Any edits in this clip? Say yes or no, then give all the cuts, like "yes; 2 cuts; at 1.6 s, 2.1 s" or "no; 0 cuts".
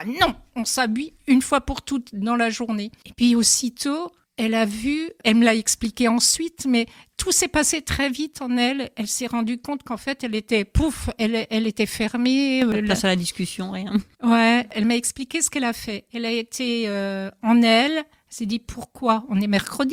no; 0 cuts